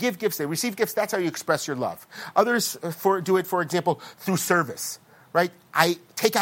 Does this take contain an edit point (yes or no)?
no